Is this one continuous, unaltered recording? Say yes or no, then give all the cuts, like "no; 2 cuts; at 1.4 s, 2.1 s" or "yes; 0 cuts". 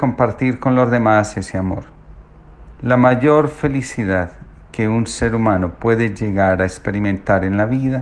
no; 1 cut; at 2.8 s